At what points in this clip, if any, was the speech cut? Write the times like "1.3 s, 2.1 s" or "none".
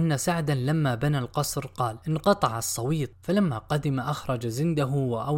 3.1 s